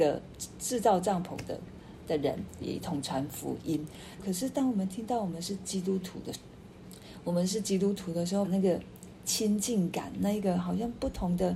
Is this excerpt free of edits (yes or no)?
no